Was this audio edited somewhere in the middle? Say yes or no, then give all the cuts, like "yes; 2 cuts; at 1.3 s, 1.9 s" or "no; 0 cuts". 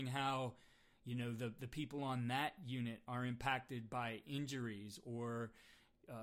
no; 0 cuts